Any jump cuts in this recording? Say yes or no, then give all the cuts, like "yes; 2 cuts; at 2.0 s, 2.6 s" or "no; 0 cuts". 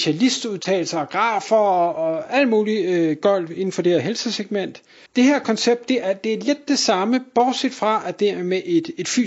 yes; 1 cut; at 5.1 s